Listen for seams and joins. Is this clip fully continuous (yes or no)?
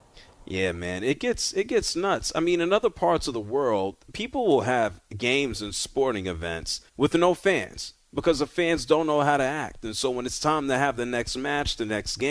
no